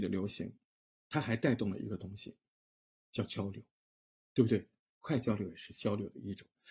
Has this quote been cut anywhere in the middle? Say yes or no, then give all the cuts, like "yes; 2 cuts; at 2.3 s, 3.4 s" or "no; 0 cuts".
no; 0 cuts